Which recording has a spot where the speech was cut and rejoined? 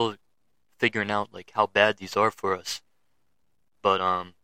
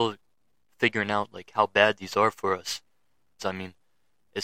second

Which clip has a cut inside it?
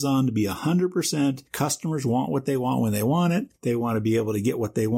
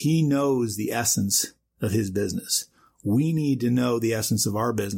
first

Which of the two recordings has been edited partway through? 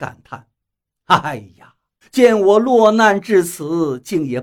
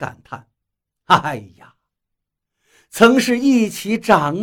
first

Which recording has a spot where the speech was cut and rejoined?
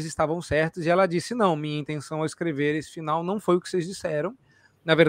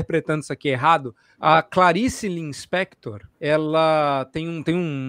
second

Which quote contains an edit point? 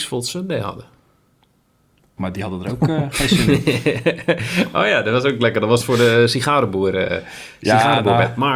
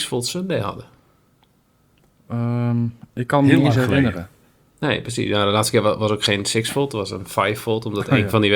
first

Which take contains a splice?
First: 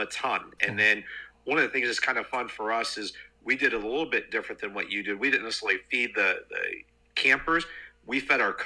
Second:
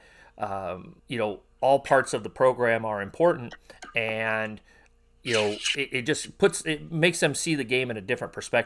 second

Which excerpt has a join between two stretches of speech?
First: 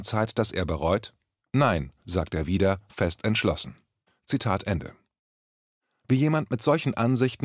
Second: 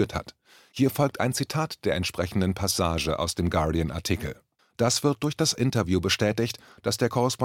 second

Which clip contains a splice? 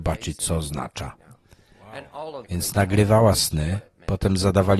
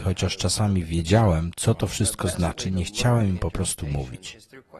first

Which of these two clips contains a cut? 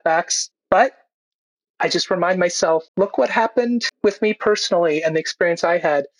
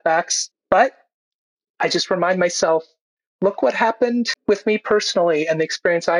first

